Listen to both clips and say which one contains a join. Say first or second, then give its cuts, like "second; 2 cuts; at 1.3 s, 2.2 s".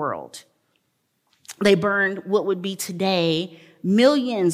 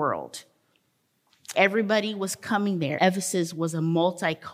second; 2 cuts; at 1.5 s, 3.0 s